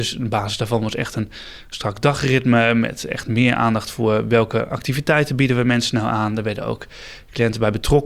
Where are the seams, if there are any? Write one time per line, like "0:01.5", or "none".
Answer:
none